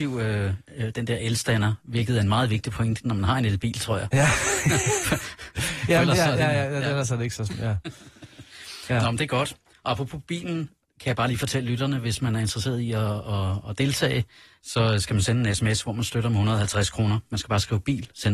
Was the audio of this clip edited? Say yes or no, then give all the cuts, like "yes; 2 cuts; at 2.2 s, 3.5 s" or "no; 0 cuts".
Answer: no; 0 cuts